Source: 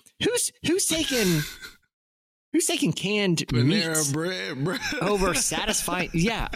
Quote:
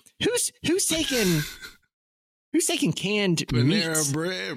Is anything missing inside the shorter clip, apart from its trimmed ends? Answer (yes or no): no